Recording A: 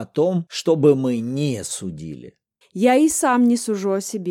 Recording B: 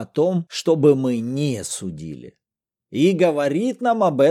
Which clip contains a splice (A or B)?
A